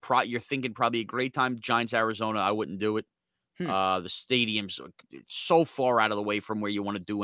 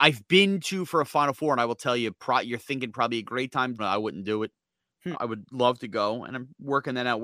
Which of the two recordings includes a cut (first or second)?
second